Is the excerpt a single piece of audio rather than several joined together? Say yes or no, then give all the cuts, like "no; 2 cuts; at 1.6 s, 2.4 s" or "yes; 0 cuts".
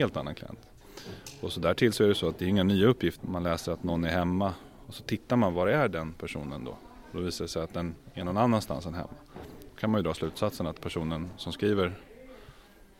no; 1 cut; at 3.2 s